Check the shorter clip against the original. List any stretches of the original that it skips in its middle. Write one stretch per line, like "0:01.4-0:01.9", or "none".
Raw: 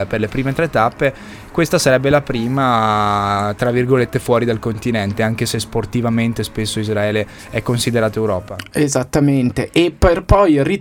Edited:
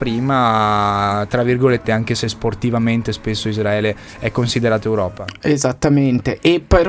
0:04.1-0:05.2

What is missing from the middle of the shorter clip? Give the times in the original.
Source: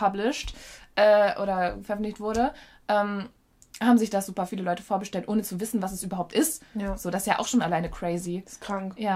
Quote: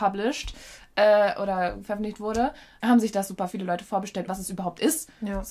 0:02.8-0:03.8
0:05.3-0:05.8

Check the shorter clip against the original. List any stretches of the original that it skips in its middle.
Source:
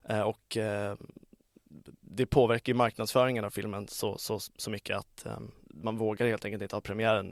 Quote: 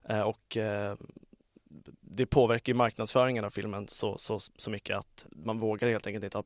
0:05.2-0:05.6

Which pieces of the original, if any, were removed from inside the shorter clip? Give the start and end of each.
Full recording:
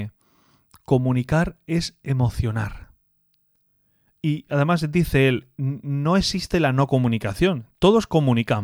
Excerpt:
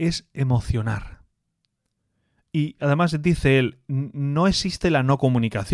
none

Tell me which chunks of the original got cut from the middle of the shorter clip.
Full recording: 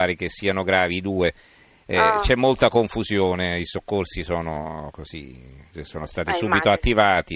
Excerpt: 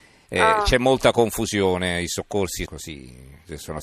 0:04.2-0:04.9

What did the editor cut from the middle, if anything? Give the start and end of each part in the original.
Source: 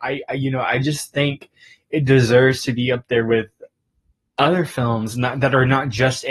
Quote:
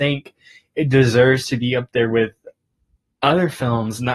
none

